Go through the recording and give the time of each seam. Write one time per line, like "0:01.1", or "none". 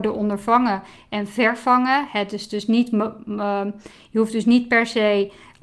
none